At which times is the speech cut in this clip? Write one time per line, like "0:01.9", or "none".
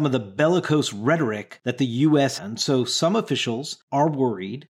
0:02.4